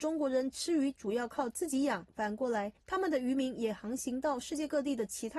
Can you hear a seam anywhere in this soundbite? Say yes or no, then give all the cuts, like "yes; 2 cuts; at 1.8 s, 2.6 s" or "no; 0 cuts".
yes; 1 cut; at 2.1 s